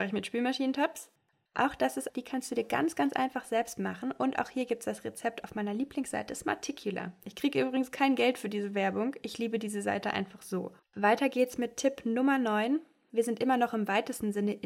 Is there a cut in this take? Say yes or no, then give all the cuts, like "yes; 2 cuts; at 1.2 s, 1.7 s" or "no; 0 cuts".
yes; 2 cuts; at 2.1 s, 10.8 s